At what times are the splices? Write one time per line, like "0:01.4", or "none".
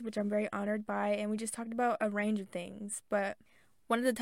none